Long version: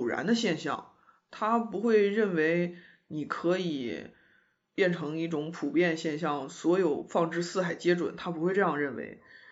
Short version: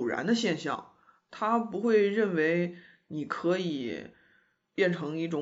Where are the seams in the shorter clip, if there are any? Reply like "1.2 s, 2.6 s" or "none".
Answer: none

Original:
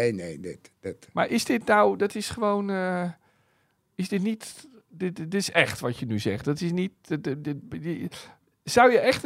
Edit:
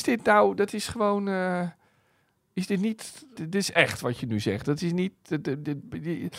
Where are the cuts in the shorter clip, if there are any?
3.4 s

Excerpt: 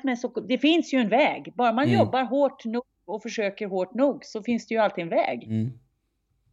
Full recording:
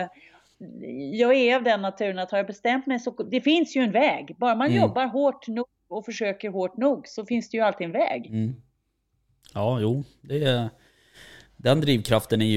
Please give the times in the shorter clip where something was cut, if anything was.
none

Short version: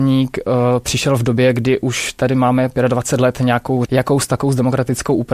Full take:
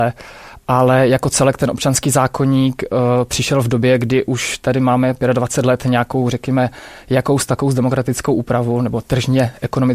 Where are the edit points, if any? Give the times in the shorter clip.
3.9 s

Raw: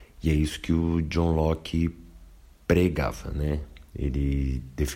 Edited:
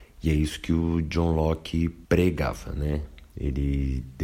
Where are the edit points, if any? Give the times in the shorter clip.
2.0 s

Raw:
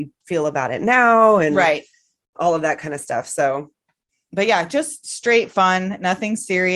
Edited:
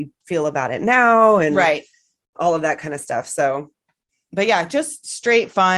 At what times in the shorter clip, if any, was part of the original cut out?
none

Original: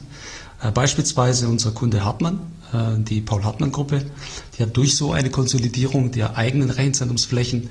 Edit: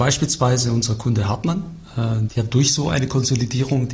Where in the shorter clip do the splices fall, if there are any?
2.3 s

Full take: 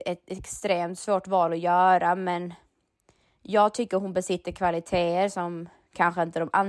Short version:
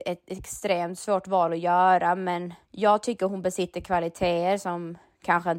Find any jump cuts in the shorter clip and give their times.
2.6 s

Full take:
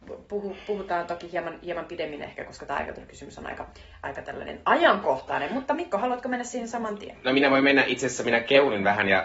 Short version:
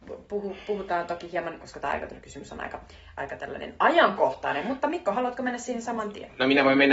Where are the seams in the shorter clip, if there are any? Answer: 1.6 s

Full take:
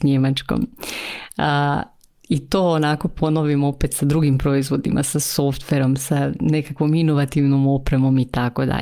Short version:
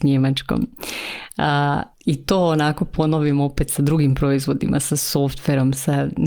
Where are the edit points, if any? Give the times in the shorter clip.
1.9 s

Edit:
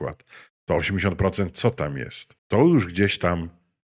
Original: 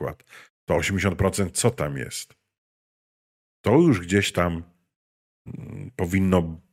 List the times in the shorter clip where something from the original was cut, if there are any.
2.4 s

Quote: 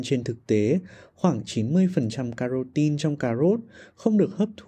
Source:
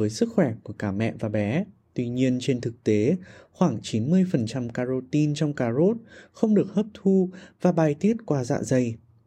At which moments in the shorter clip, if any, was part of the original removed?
none

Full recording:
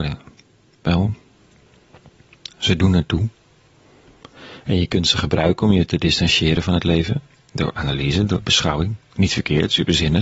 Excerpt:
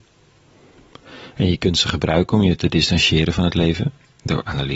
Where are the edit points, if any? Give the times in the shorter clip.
none

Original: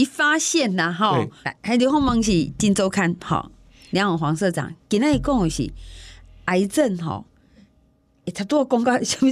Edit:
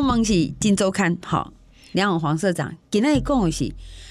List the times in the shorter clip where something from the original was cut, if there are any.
none

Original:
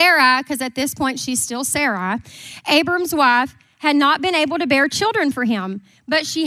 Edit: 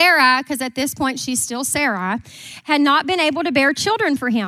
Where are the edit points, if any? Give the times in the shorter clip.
2.6 s

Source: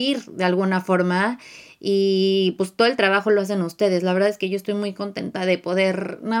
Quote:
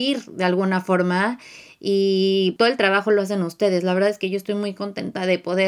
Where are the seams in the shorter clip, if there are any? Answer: 2.6 s

